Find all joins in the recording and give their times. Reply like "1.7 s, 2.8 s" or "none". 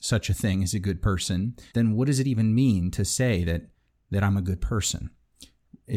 1.7 s